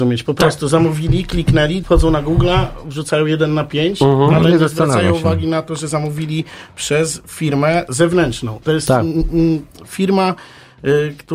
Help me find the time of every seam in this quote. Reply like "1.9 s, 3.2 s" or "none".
1.8 s